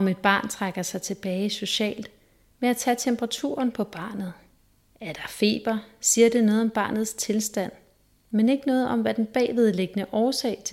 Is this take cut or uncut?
uncut